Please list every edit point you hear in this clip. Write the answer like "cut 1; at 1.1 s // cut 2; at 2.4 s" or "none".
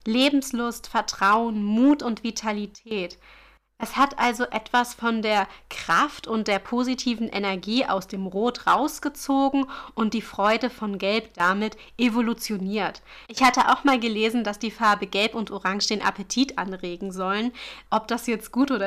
cut 1; at 13.2 s // cut 2; at 17.9 s